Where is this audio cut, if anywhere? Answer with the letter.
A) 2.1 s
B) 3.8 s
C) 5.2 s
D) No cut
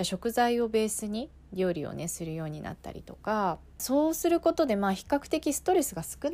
B